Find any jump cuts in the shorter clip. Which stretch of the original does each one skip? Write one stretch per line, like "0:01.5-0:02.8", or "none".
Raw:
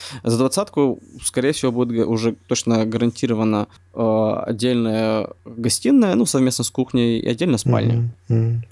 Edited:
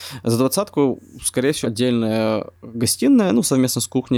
0:01.6-0:04.5

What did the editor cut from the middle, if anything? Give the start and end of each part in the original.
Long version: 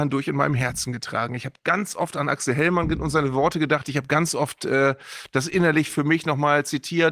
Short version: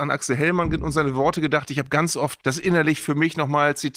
0:04.6-0:05.3

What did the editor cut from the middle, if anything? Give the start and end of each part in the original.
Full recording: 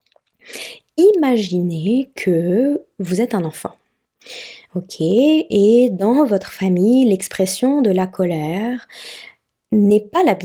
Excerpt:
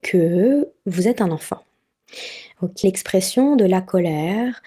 0:05.0-0:07.1

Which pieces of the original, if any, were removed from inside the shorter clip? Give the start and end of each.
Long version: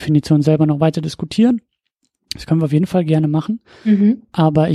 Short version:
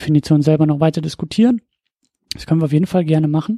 none

